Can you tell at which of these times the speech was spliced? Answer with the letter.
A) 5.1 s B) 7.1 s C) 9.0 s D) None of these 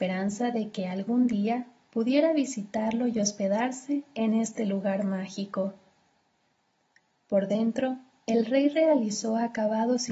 B